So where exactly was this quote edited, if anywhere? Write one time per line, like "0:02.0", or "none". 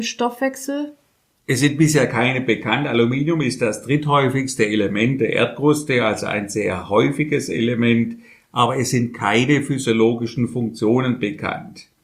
none